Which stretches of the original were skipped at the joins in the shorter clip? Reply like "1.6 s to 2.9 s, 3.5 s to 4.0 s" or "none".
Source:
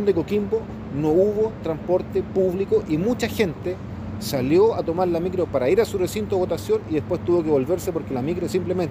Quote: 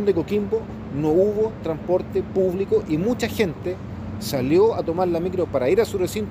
none